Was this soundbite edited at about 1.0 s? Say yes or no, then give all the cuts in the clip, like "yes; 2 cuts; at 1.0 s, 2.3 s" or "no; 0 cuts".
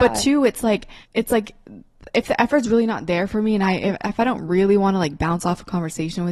yes; 1 cut; at 1.0 s